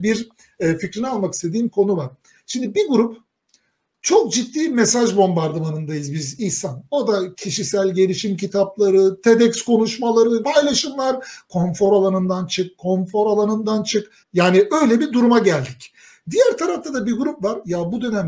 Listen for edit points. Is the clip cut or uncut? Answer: cut